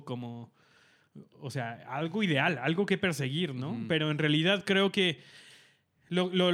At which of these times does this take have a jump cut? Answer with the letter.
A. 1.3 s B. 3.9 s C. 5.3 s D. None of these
D